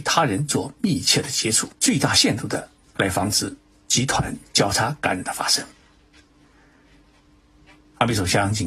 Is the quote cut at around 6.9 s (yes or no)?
no